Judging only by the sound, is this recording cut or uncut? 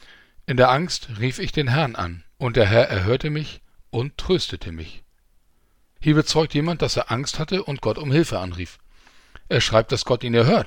cut